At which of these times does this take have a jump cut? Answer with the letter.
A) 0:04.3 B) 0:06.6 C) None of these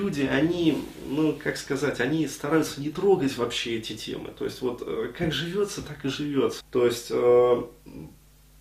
B